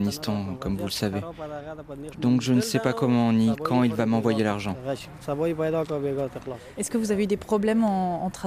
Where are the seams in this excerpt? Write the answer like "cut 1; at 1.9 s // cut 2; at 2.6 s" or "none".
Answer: cut 1; at 2.1 s // cut 2; at 6.8 s